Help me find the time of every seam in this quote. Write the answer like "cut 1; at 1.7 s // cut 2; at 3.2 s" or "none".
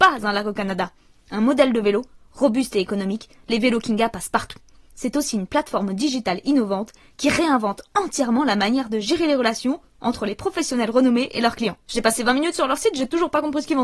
cut 1; at 4.9 s // cut 2; at 11.8 s